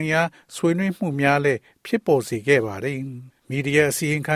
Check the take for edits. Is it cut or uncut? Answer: cut